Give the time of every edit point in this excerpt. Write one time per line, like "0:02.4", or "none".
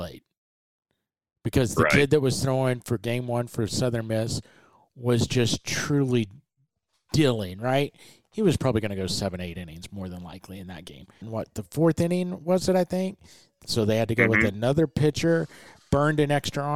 0:11.2